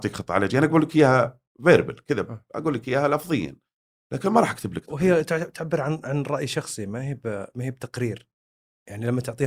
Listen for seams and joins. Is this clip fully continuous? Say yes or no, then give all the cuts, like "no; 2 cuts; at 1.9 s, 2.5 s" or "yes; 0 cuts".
yes; 0 cuts